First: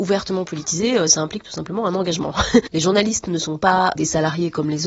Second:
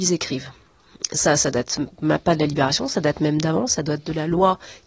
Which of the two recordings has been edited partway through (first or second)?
first